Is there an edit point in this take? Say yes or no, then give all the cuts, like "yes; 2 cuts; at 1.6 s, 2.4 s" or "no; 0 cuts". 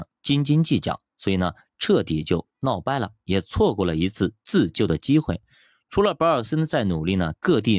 no; 0 cuts